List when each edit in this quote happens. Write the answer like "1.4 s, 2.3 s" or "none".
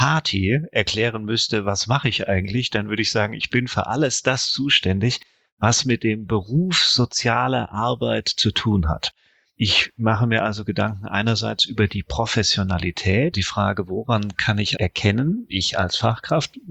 13.3 s, 14.8 s